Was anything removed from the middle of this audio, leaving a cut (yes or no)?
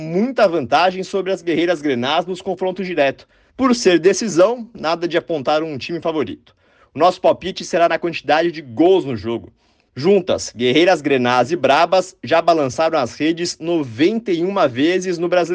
yes